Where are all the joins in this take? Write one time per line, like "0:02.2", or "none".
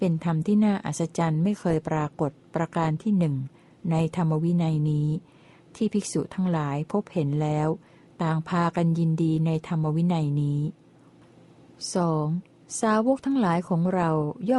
none